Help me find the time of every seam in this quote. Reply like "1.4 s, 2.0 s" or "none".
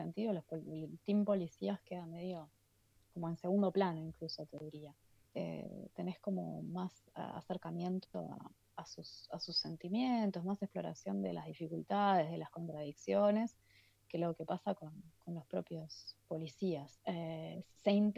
5.3 s, 17.0 s